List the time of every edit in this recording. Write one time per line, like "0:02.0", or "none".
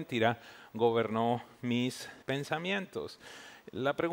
0:02.2